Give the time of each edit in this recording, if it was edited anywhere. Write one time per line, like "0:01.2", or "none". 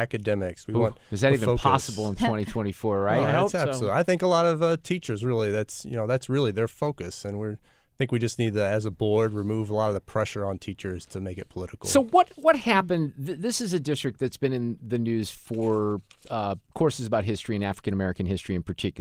none